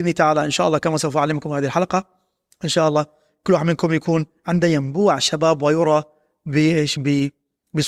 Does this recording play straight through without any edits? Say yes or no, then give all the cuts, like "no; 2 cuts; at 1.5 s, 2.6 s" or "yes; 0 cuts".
yes; 0 cuts